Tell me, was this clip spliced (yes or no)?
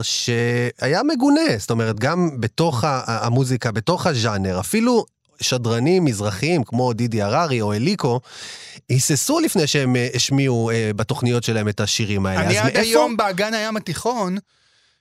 no